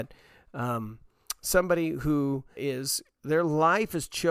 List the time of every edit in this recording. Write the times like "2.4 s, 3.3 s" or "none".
2.6 s